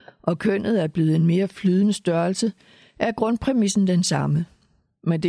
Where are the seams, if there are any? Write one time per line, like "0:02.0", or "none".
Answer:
none